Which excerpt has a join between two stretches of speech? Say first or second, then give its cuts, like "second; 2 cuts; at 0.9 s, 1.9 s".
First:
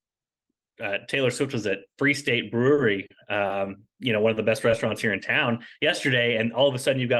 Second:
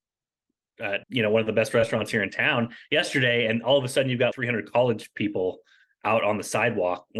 second; 2 cuts; at 1.0 s, 4.3 s